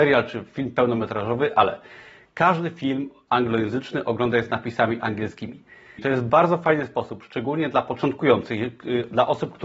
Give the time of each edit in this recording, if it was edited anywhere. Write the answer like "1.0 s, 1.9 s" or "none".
6.0 s